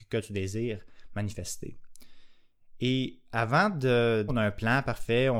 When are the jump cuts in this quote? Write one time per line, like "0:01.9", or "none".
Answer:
0:04.3